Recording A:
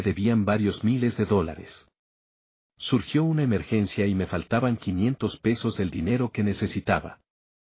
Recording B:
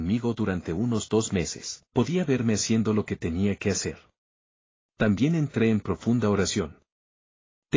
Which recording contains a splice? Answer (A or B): B